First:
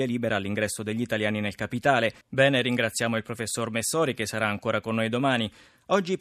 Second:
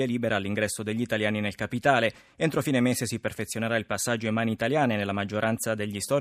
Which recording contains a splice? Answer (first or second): first